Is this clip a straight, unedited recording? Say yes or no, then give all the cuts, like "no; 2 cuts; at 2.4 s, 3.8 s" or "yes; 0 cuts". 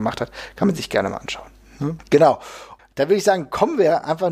no; 1 cut; at 2.0 s